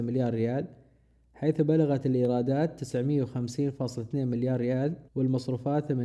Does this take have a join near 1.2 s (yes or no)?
no